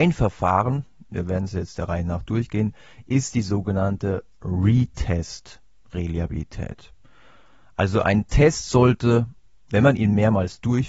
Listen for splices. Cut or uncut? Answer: uncut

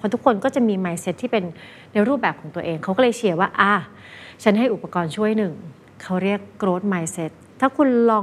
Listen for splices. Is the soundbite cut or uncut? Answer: uncut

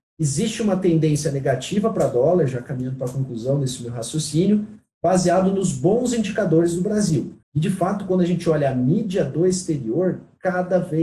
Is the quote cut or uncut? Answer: cut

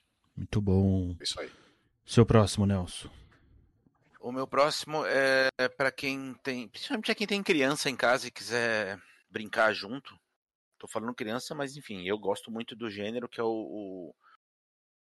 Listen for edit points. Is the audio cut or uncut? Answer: uncut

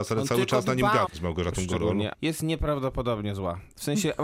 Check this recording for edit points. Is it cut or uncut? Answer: cut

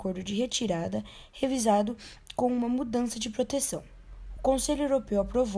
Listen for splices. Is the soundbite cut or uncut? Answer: uncut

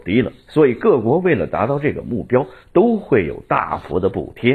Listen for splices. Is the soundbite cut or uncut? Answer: uncut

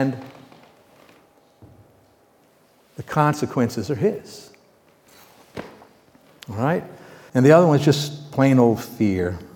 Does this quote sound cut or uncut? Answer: cut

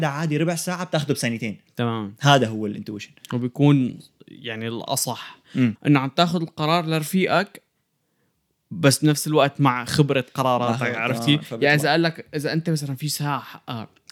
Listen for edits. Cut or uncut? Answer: cut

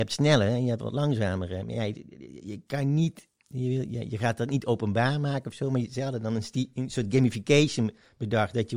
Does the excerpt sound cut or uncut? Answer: uncut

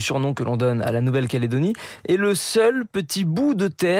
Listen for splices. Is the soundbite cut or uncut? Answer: uncut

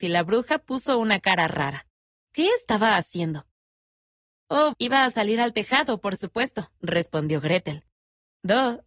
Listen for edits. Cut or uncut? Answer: cut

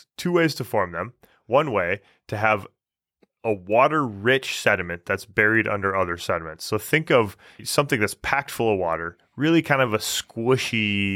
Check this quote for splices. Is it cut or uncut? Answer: uncut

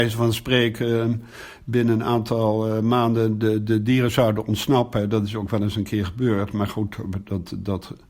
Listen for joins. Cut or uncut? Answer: uncut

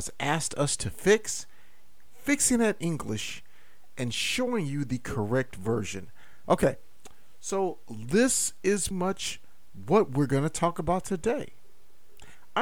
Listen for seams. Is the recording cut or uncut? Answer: cut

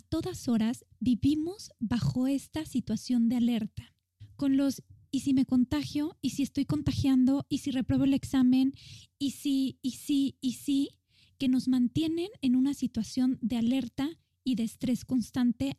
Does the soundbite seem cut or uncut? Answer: cut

